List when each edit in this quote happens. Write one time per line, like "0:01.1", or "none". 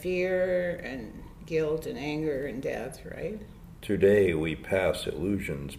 0:03.7